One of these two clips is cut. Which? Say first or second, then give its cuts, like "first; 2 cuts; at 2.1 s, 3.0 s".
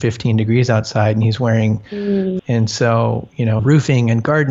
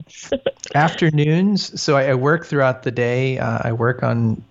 first; 2 cuts; at 2.4 s, 3.6 s